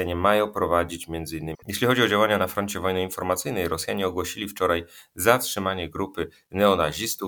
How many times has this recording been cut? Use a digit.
1